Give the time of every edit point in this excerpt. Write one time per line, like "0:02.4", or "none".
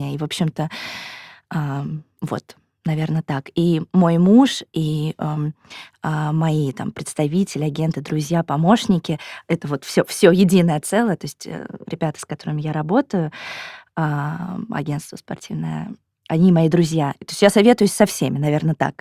none